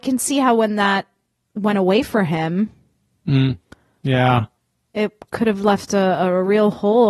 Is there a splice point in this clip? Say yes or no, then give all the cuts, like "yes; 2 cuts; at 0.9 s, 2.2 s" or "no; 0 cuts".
no; 0 cuts